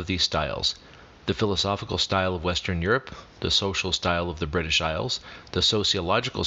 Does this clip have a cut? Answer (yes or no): no